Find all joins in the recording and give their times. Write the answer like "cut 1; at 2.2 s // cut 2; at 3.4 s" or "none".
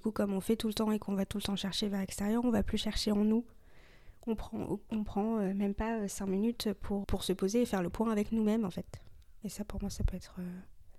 cut 1; at 7.0 s